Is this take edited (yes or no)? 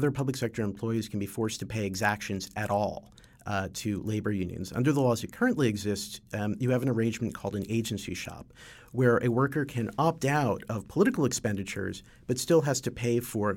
no